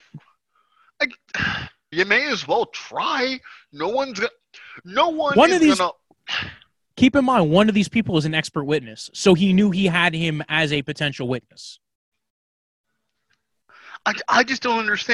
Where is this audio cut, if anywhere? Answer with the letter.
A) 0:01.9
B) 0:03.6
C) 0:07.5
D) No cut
A